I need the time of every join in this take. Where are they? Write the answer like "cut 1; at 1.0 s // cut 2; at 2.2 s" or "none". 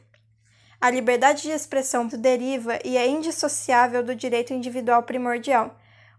cut 1; at 2.1 s